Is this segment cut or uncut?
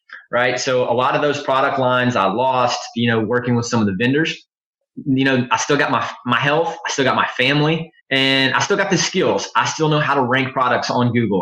cut